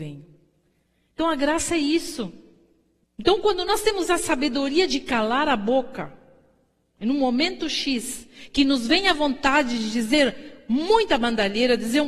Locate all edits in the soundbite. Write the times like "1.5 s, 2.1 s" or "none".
3.0 s